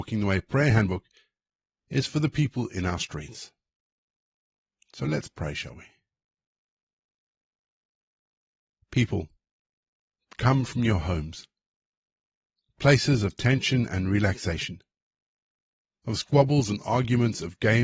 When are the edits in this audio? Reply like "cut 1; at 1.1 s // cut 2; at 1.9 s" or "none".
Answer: none

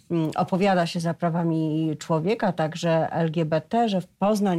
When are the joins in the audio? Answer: none

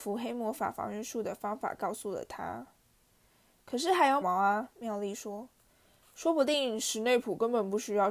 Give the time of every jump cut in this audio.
cut 1; at 4.2 s

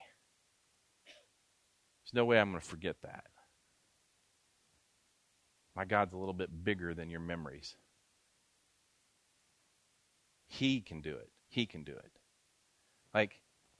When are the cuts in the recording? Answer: cut 1; at 11.4 s

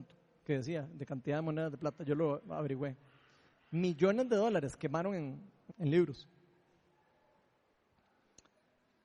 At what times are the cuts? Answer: cut 1; at 5.7 s

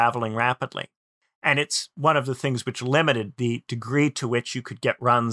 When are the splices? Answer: none

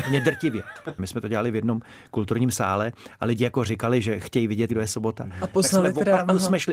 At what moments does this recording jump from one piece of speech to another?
cut 1; at 1.0 s // cut 2; at 4.7 s

